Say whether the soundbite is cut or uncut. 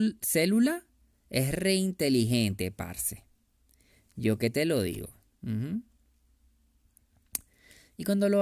uncut